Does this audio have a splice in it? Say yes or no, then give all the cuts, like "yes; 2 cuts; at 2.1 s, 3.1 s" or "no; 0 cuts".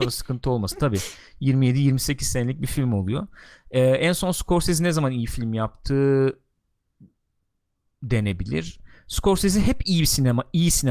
no; 0 cuts